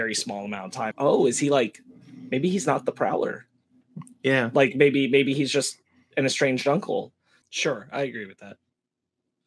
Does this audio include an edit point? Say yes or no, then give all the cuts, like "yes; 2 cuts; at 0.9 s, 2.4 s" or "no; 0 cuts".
yes; 2 cuts; at 0.9 s, 7.4 s